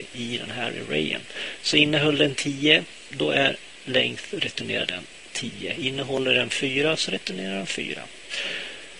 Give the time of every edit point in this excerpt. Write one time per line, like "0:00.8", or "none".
0:03.1

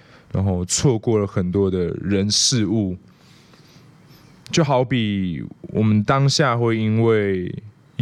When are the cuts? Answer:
none

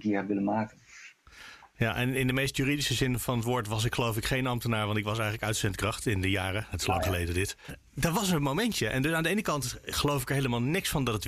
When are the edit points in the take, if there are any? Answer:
0:07.7

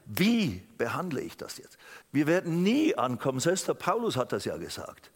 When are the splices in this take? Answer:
0:02.0

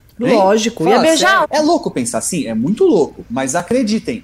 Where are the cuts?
0:01.4

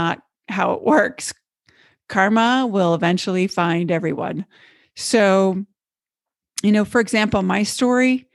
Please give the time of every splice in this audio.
none

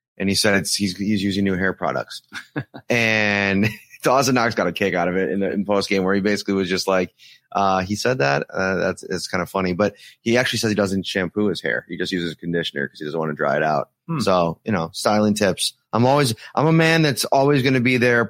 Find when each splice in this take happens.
none

